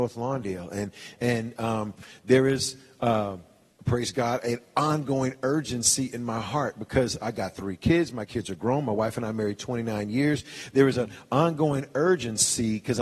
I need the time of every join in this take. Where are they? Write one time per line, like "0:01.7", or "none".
none